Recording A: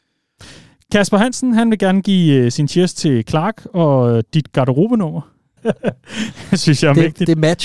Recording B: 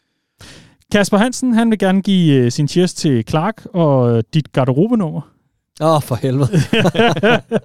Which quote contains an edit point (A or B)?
A